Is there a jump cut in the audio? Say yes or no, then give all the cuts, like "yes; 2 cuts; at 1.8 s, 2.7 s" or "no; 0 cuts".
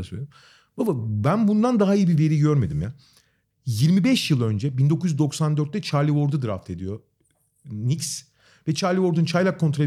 yes; 1 cut; at 3.5 s